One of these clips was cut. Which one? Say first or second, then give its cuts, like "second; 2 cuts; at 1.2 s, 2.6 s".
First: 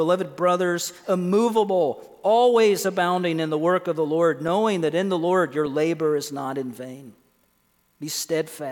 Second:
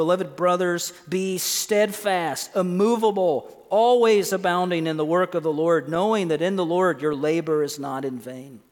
first; 1 cut; at 1.0 s